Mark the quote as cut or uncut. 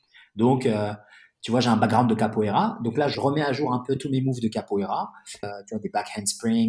cut